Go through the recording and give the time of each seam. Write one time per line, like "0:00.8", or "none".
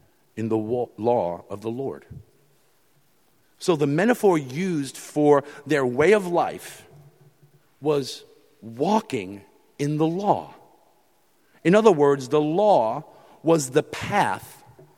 none